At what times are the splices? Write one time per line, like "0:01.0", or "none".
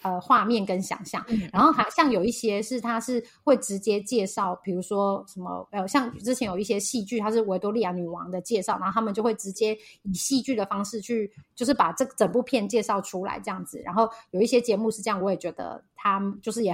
none